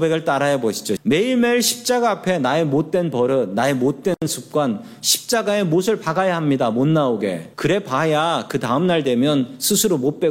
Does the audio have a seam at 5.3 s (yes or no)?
no